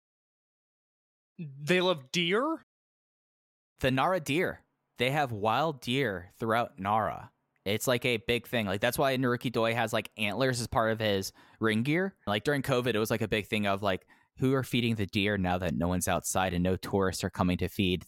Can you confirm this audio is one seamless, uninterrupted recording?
no; 1 cut; at 12.3 s

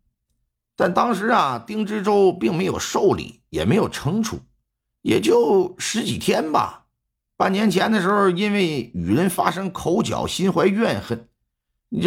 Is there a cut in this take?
yes; 2 cuts; at 4.9 s, 7.3 s

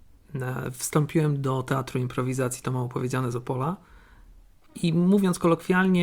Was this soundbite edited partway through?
no; 0 cuts

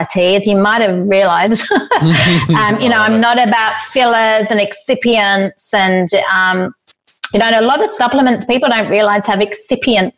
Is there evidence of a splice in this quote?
no; 0 cuts

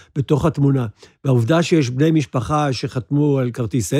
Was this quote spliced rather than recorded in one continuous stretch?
no; 0 cuts

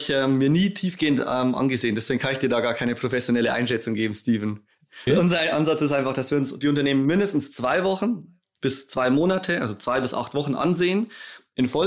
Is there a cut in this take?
yes; 1 cut; at 5.1 s

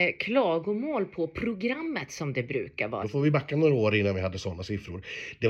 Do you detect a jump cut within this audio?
yes; 1 cut; at 3.0 s

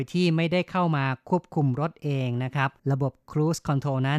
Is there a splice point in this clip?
yes; 1 cut; at 2.8 s

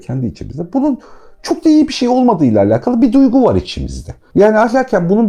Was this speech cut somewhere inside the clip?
no; 0 cuts

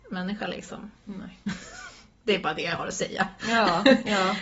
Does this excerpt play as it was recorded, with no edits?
yes; 0 cuts

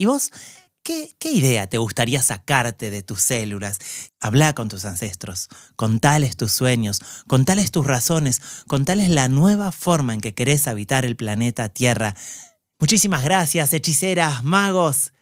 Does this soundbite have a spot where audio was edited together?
yes; 2 cuts; at 4.1 s, 12.7 s

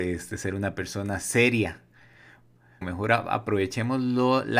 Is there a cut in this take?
yes; 1 cut; at 2.8 s

